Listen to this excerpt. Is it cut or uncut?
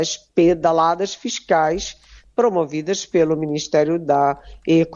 uncut